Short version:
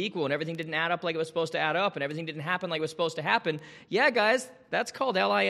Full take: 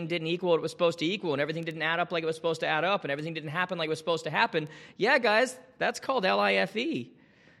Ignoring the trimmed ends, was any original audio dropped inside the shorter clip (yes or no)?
no